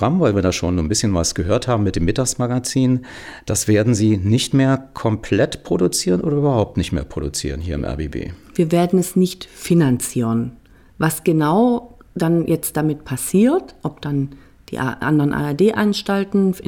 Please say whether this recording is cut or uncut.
uncut